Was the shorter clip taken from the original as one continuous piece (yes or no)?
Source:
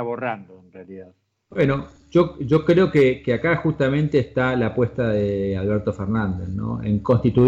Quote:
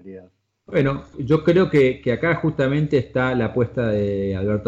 no